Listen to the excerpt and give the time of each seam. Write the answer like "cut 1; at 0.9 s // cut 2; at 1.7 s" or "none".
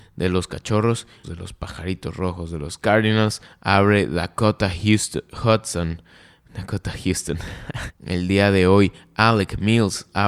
cut 1; at 1.2 s // cut 2; at 7.9 s